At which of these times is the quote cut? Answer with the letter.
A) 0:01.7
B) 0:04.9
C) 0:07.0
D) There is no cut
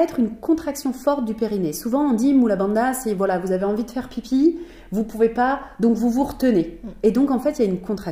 D